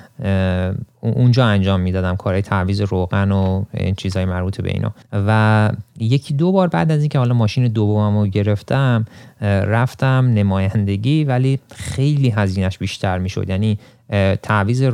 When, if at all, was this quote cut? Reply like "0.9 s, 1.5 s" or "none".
5.0 s